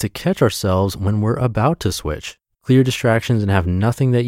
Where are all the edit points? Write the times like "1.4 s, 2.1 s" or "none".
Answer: 2.5 s